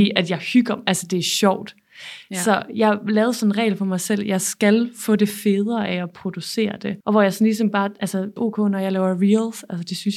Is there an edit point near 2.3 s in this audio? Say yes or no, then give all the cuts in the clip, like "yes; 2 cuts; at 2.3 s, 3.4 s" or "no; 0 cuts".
no; 2 cuts; at 7.0 s, 8.4 s